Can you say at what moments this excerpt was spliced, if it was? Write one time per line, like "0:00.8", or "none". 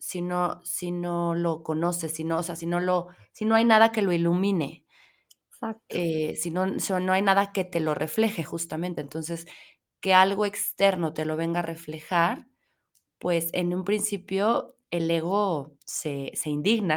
none